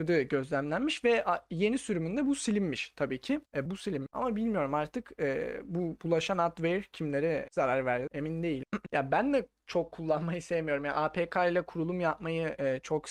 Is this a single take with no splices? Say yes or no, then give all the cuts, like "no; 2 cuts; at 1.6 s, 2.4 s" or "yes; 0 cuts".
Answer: no; 2 cuts; at 3.7 s, 8.9 s